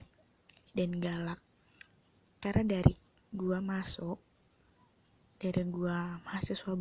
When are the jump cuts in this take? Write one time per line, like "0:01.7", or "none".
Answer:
none